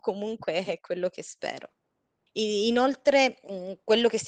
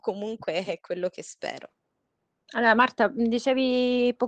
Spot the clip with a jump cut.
first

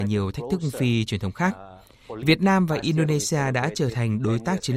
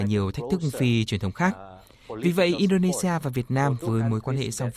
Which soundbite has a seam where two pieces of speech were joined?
first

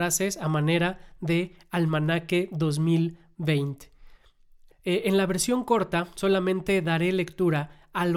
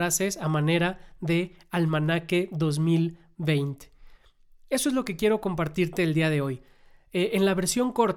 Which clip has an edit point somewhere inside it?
first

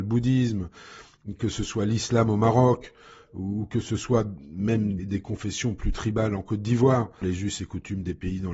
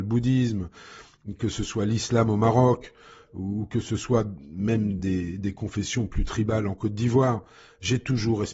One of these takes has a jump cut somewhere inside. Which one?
first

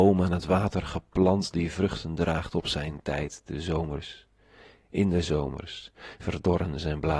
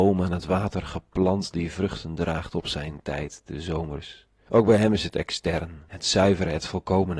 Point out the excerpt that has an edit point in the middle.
second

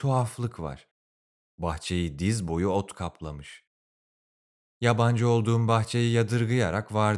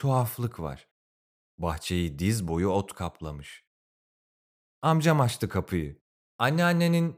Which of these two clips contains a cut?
second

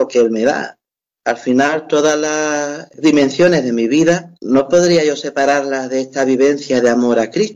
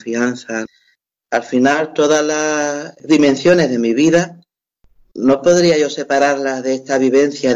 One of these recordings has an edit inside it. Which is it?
first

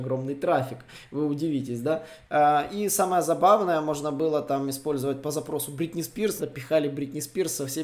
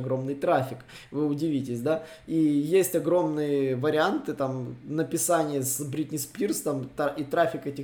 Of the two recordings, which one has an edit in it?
first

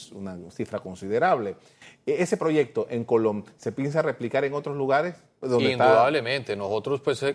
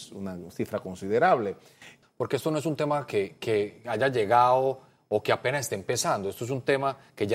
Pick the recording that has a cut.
second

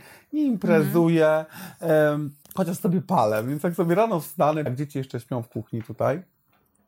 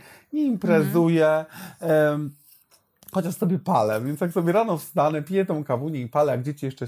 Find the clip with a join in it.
first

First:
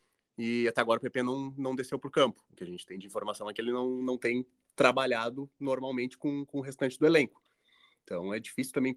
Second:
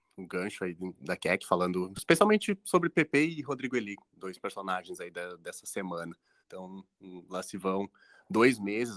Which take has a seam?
second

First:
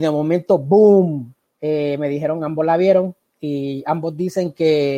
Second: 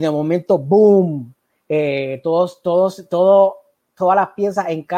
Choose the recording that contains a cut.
first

